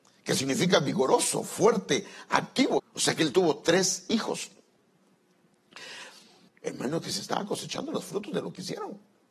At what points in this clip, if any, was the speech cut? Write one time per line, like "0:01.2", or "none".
0:02.8
0:06.5